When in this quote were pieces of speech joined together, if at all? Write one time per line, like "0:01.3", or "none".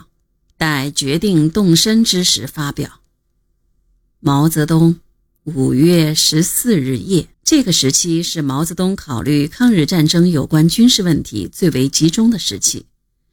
0:07.3

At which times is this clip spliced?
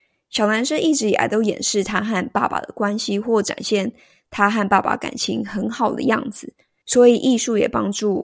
0:06.8

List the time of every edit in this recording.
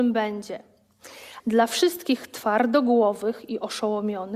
0:01.4

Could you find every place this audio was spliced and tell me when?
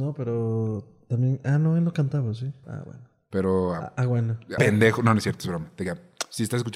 0:02.6
0:04.6

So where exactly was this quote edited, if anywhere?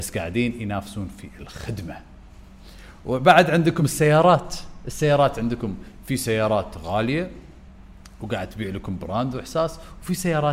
none

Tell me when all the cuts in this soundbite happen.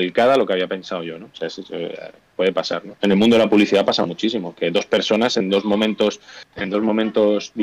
0:03.0
0:06.5

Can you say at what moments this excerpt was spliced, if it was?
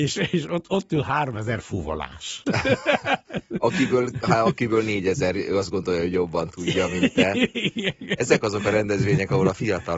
none

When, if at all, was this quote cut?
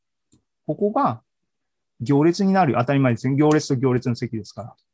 none

